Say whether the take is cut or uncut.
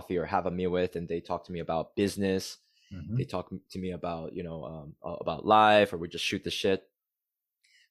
uncut